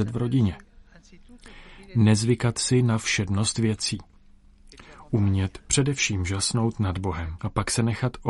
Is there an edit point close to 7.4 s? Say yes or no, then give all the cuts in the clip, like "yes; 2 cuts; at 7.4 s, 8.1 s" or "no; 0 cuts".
yes; 1 cut; at 7.4 s